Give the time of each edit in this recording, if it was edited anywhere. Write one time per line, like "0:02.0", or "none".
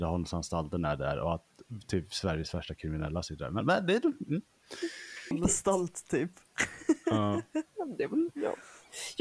0:05.3